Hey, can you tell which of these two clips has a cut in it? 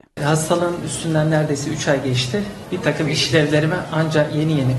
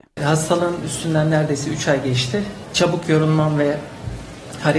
second; 1 cut; at 2.7 s

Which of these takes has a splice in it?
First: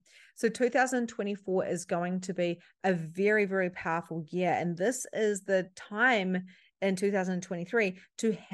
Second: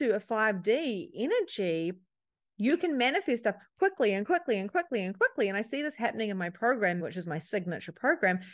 second; 1 cut; at 7.0 s

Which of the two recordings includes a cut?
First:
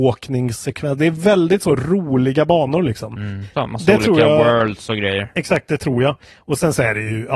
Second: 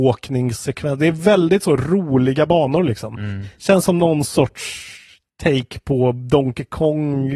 first; 1 cut; at 3.5 s

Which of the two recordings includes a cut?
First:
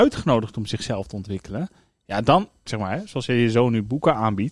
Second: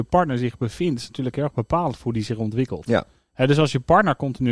first; 1 cut; at 2.7 s

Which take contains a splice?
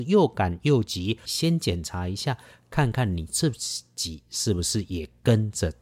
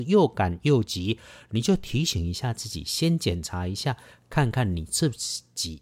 first; 1 cut; at 1.3 s

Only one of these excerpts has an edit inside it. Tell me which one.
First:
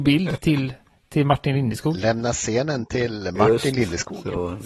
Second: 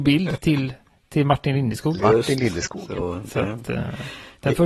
second; 1 cut; at 2.0 s

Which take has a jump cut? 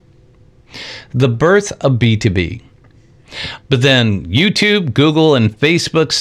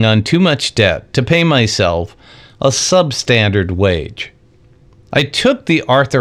first; 1 cut; at 3.6 s

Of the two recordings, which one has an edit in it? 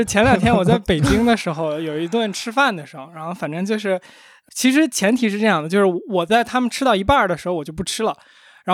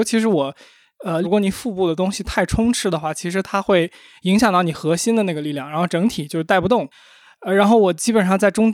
second; 1 cut; at 1.2 s

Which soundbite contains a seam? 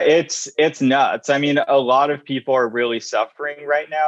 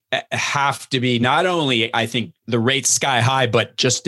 second; 1 cut; at 2.4 s

